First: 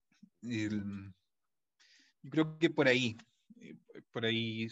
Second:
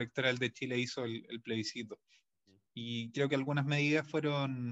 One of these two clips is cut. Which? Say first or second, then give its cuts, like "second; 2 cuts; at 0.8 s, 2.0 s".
second; 1 cut; at 2.7 s